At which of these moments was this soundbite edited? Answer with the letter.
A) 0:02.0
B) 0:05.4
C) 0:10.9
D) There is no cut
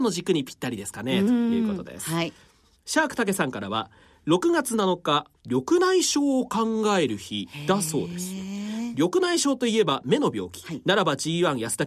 B